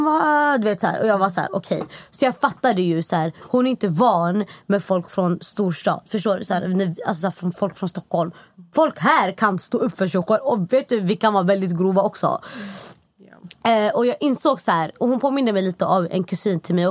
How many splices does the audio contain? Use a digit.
0